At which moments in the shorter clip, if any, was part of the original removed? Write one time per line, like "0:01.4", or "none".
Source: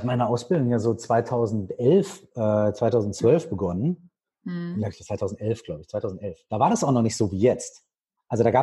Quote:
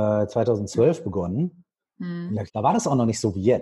0:02.5